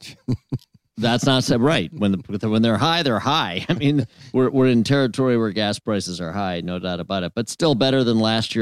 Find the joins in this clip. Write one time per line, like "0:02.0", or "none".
none